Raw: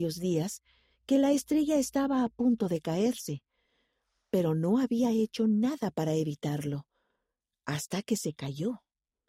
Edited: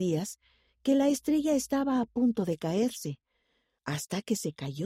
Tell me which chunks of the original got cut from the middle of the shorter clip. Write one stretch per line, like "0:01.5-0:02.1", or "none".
0:04.0-0:07.6